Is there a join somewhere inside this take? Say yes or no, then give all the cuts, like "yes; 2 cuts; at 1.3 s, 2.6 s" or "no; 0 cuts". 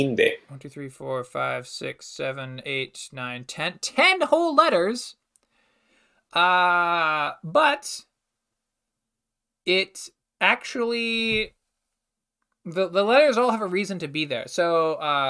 no; 0 cuts